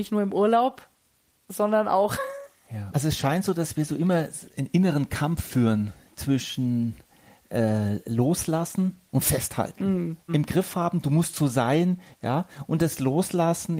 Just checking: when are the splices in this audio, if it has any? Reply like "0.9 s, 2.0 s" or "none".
2.9 s, 10.3 s, 12.1 s